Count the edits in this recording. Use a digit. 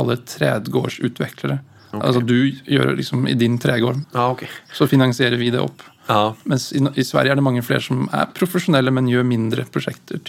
1